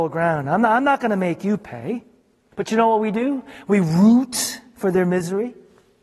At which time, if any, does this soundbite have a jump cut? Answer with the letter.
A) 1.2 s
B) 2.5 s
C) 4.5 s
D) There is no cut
B